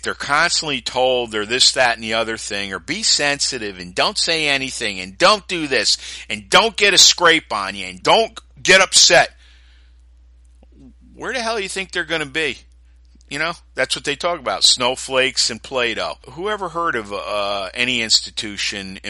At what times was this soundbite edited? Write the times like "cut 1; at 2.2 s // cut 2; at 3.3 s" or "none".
cut 1; at 8.0 s // cut 2; at 16.2 s